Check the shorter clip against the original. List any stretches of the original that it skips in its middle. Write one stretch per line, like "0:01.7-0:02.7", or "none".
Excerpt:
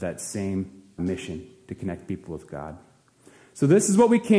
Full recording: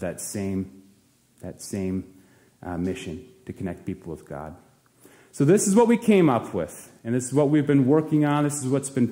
0:01.0-0:02.8